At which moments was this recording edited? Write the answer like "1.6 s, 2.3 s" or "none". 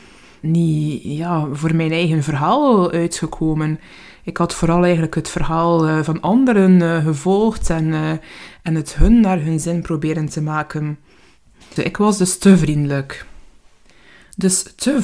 11.8 s